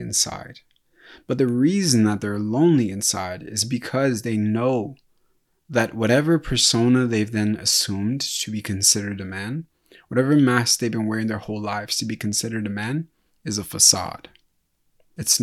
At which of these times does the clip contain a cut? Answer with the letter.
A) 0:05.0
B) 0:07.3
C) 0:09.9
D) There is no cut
D